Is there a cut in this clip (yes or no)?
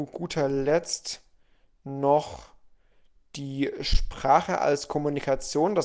no